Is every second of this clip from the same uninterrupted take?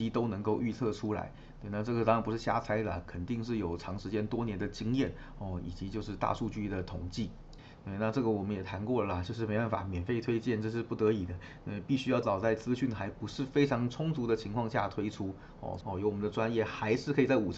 no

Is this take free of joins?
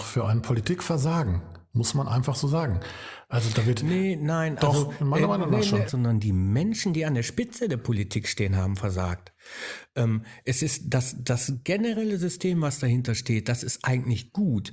no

